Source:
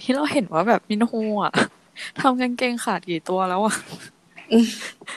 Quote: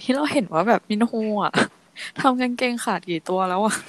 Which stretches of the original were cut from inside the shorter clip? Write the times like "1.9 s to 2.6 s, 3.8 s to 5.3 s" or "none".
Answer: none

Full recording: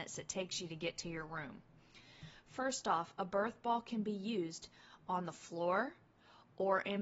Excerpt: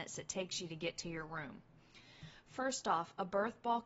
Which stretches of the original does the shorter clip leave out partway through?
none

